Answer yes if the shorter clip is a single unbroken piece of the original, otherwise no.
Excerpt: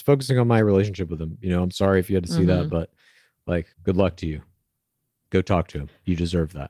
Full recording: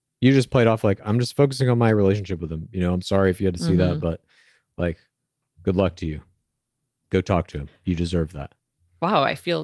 no